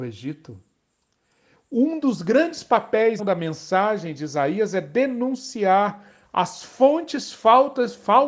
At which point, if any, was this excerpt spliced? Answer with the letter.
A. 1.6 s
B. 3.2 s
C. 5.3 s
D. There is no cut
B